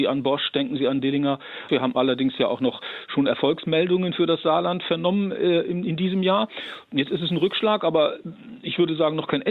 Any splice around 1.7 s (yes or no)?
yes